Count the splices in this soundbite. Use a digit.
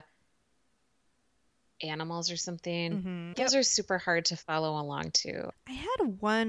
2